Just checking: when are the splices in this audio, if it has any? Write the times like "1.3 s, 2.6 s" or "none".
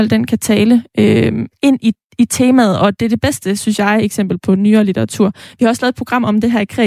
none